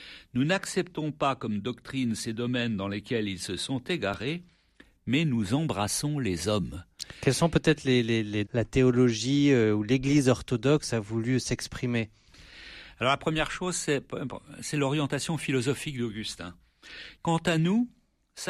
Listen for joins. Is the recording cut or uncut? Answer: cut